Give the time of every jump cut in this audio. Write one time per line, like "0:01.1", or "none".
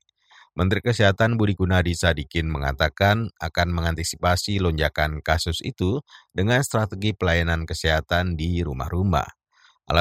none